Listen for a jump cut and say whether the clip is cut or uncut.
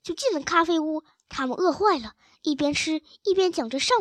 uncut